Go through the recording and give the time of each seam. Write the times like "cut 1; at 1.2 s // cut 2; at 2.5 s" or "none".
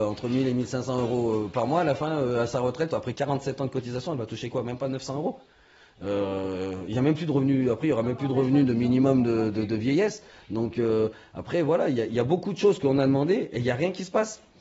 cut 1; at 3.1 s